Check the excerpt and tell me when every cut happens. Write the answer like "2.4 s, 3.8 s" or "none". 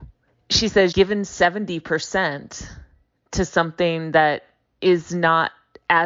0.9 s